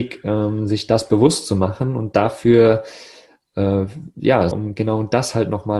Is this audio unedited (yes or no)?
no